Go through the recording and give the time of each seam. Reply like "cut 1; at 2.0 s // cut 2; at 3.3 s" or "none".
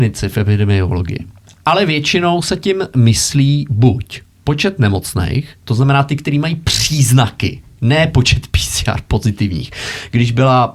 none